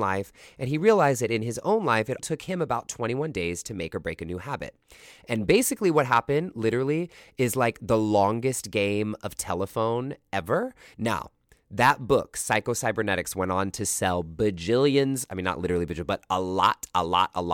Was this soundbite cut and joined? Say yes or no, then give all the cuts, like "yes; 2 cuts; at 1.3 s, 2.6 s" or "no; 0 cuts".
yes; 3 cuts; at 2.2 s, 5.2 s, 10.9 s